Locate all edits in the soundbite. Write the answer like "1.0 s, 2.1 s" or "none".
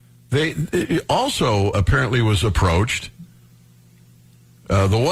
1.7 s